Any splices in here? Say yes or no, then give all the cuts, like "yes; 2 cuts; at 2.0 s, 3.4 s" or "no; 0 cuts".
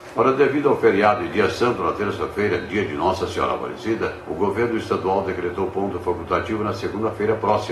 no; 0 cuts